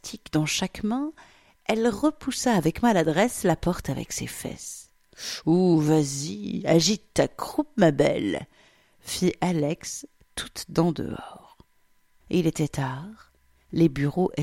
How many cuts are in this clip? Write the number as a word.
one